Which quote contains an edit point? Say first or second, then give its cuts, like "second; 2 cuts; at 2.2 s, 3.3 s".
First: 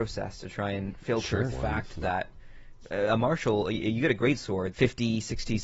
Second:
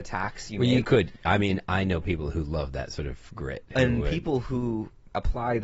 first; 2 cuts; at 1.5 s, 4.7 s